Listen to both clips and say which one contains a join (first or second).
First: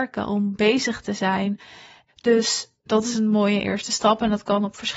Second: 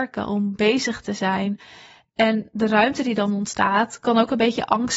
first